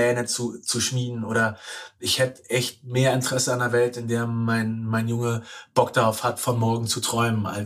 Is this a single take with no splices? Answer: yes; 0 cuts

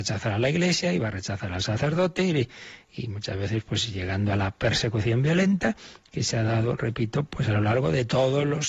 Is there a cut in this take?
no; 0 cuts

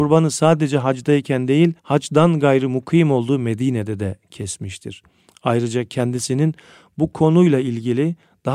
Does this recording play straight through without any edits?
no; 1 cut; at 1.8 s

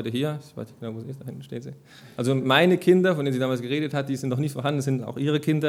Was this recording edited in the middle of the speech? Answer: no; 0 cuts

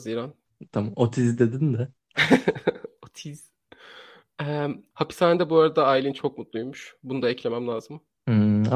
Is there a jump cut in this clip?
no; 0 cuts

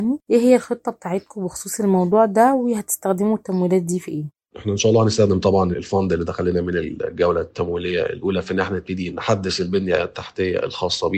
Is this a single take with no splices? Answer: no; 1 cut; at 4.5 s

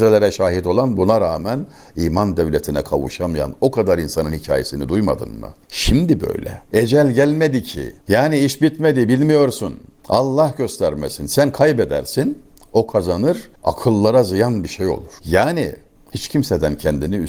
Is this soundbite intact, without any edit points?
no; 1 cut; at 5.6 s

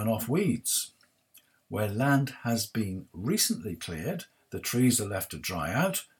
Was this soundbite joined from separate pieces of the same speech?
no; 0 cuts

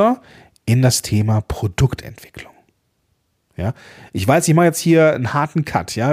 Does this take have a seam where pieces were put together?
no; 0 cuts

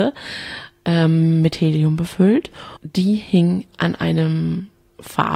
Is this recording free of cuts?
no; 1 cut; at 2.8 s

